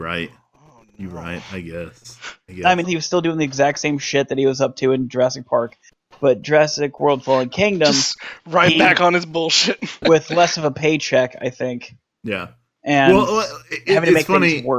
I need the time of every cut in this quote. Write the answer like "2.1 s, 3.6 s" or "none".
2.8 s, 10.0 s